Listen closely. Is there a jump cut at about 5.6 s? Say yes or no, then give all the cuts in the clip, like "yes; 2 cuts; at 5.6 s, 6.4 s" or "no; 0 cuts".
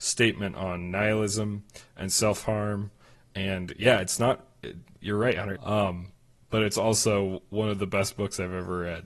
yes; 1 cut; at 5.6 s